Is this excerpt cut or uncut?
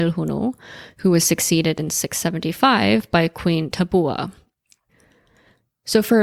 uncut